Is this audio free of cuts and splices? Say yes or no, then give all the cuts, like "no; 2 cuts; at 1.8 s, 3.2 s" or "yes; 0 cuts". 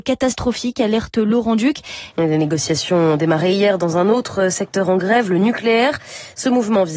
no; 1 cut; at 2.1 s